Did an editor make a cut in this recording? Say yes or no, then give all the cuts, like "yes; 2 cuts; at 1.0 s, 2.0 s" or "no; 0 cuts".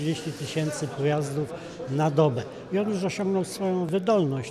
no; 0 cuts